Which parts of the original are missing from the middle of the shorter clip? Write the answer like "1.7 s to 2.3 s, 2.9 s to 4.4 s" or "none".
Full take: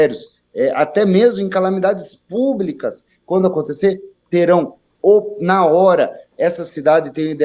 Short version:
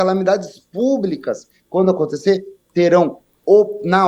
none